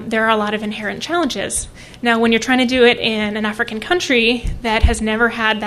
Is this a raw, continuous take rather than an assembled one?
yes; 0 cuts

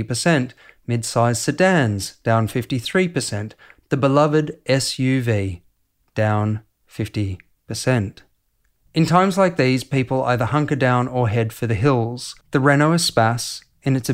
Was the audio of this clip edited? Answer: yes; 2 cuts; at 8.8 s, 12.4 s

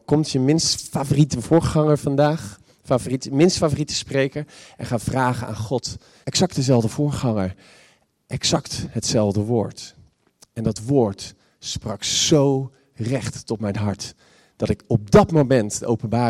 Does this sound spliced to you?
yes; 1 cut; at 6.2 s

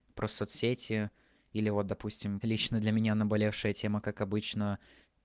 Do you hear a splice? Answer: yes; 1 cut; at 2.4 s

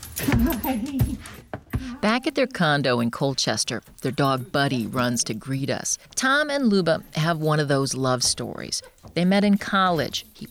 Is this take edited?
yes; 1 cut; at 6.1 s

